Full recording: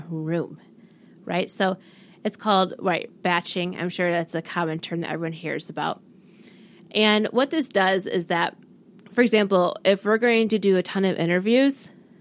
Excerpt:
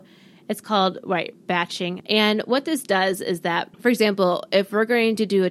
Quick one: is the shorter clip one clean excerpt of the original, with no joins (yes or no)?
no